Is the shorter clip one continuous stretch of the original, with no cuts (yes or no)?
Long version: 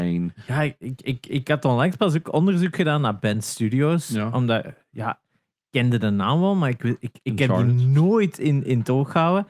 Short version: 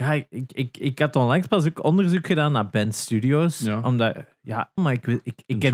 no